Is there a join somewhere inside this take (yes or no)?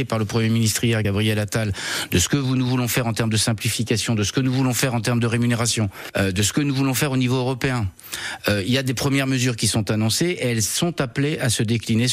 no